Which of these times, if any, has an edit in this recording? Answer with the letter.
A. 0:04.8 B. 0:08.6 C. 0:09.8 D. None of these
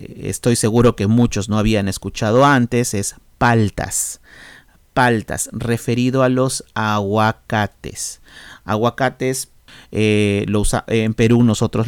D